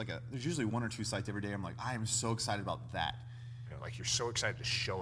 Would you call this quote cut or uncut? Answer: cut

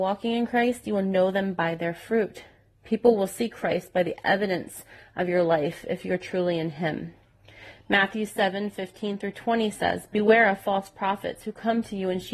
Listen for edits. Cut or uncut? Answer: uncut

